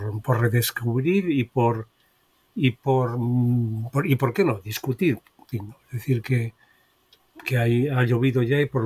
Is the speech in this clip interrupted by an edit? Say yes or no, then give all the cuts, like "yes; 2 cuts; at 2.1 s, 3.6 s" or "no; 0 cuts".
yes; 1 cut; at 5.5 s